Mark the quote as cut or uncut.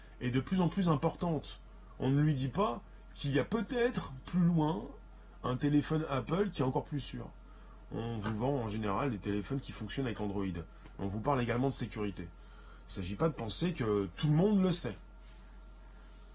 uncut